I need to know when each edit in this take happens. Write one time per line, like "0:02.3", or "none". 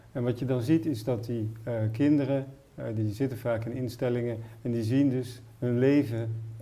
none